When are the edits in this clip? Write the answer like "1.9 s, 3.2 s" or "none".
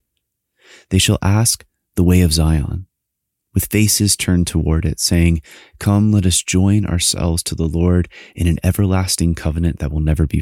none